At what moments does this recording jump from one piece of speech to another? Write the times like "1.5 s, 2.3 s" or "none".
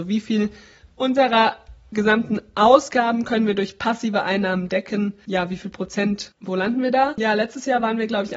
none